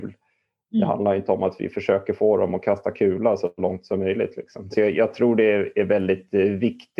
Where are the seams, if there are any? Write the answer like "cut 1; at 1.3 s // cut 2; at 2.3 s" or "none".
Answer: cut 1; at 4.7 s